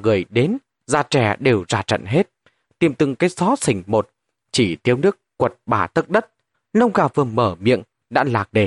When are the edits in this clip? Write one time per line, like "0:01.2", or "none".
0:02.7
0:06.5